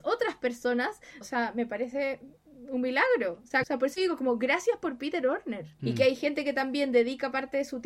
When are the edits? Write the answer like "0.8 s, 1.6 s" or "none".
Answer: 1.2 s, 3.6 s, 5.8 s